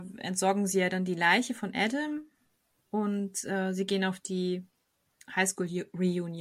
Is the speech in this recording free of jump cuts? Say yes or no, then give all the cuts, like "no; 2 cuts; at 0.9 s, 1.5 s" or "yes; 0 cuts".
yes; 0 cuts